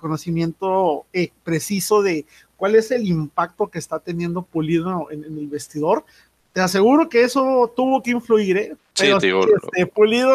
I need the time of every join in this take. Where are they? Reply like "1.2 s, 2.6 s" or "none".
8.8 s